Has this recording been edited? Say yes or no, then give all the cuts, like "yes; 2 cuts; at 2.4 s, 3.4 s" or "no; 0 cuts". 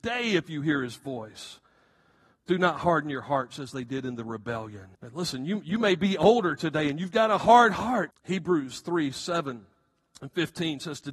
yes; 2 cuts; at 4.9 s, 8.1 s